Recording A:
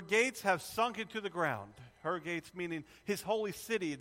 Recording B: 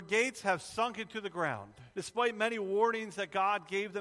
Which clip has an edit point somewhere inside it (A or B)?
B